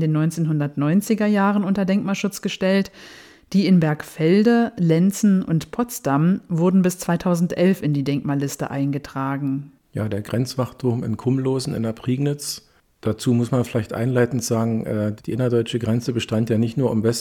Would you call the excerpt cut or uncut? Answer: cut